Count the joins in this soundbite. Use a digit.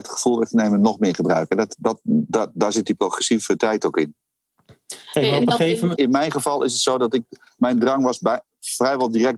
1